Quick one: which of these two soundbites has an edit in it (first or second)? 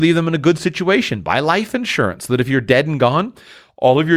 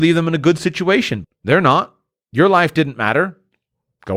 second